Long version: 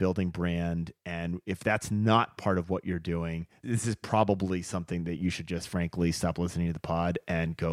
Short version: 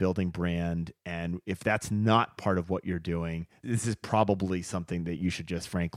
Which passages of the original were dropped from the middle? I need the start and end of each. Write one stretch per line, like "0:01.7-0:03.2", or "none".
none